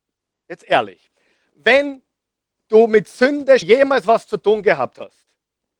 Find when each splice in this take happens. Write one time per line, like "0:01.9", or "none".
0:03.6